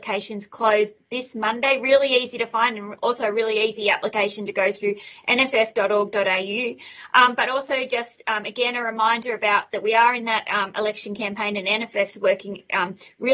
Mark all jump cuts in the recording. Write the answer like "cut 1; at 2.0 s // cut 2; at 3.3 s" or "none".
none